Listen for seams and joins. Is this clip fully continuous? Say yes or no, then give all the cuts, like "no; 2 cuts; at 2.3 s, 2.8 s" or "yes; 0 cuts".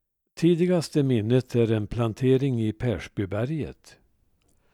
yes; 0 cuts